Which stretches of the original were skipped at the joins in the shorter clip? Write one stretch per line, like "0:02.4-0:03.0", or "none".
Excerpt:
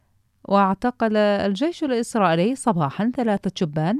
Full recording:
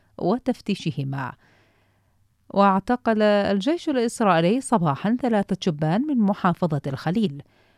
none